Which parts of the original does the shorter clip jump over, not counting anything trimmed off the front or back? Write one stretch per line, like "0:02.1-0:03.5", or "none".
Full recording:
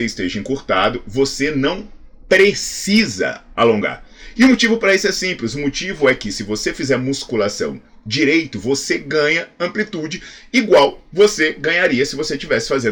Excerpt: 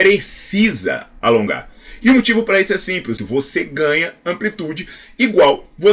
0:05.5-0:08.5